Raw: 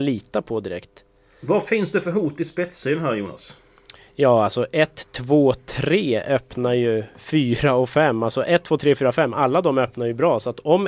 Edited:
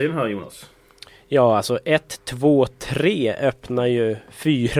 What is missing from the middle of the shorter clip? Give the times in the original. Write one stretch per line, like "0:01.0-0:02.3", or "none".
none